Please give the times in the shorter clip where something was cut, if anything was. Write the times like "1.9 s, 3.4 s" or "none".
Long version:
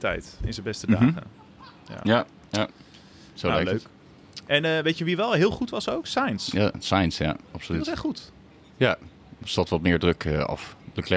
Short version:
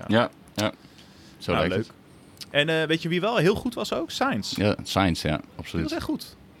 none